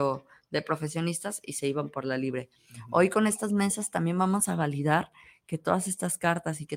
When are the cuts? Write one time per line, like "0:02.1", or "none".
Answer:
none